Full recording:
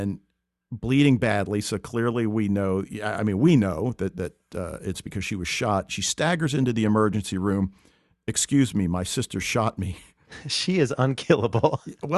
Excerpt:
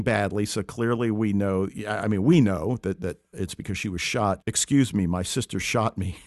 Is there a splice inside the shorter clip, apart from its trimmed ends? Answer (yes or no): yes